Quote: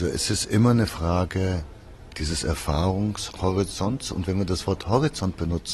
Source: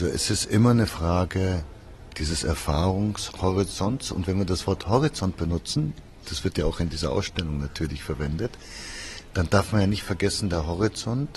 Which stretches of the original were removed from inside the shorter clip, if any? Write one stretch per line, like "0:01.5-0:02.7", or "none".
none

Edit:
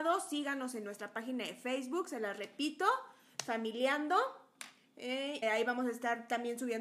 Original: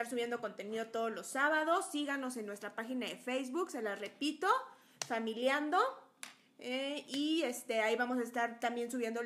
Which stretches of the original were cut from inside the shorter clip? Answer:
0:07.0-0:07.7

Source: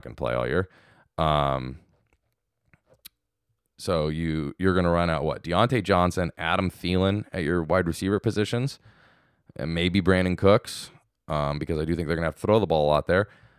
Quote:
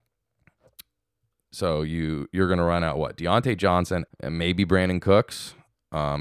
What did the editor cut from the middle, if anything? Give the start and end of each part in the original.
0:06.3-0:09.4

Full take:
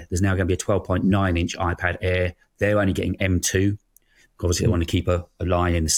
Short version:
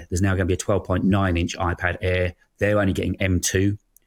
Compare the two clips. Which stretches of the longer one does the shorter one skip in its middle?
none

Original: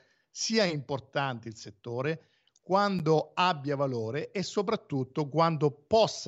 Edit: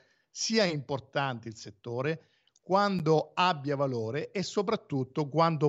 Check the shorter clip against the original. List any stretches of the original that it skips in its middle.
none

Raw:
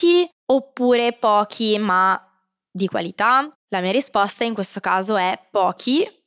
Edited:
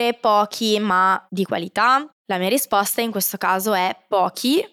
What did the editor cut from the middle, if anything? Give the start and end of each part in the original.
0:02.2-0:02.7

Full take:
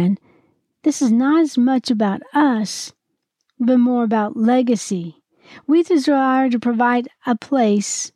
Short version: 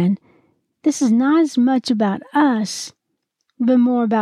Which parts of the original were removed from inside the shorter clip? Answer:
none

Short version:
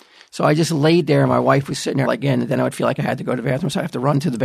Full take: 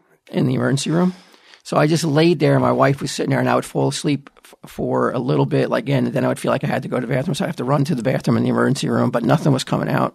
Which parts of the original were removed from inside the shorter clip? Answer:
0:03.4-0:05.7

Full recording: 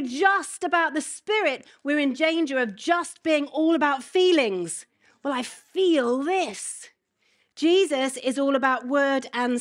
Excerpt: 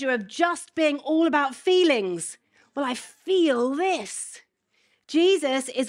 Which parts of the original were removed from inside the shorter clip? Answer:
none

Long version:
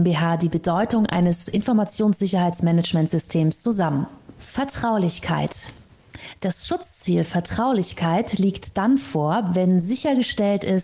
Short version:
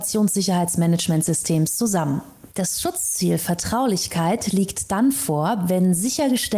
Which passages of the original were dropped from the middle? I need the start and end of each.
0:04.3-0:06.3

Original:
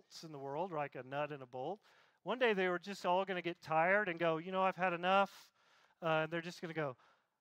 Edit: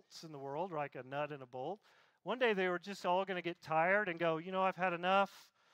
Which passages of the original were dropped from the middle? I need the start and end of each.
none

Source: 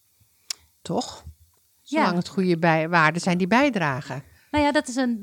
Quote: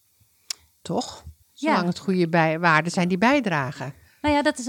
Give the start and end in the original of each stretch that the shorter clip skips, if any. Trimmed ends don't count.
0:01.4-0:01.7

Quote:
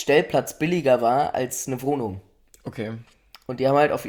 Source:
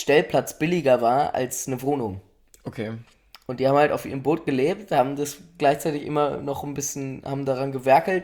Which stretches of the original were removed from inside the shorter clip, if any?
none

